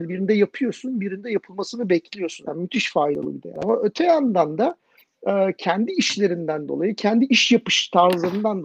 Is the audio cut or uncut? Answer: cut